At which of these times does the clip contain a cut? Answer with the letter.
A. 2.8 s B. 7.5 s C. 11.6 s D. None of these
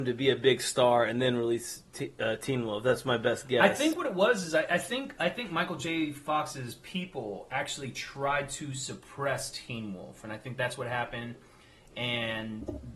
D